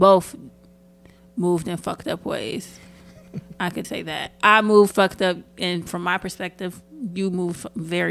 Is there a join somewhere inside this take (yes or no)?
yes